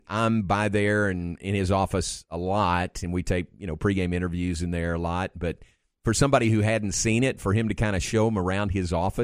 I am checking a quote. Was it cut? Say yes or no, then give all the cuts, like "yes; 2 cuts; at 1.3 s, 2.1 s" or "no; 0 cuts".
no; 0 cuts